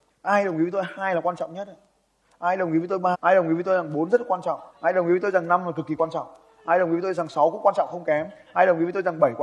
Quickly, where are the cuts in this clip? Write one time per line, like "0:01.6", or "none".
0:03.1
0:04.7